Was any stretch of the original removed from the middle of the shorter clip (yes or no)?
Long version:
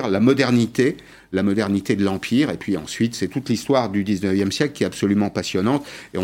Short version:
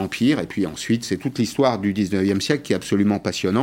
no